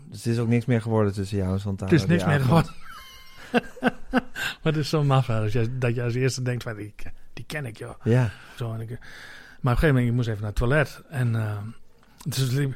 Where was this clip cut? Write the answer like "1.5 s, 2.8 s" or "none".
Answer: 8.6 s